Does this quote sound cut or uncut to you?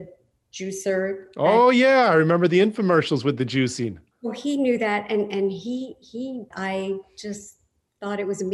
cut